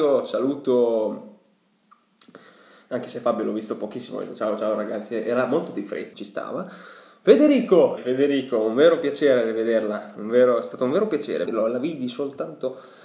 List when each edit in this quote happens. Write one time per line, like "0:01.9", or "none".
0:06.1
0:08.0
0:11.5